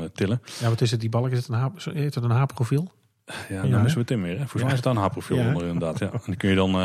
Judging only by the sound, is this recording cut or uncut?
cut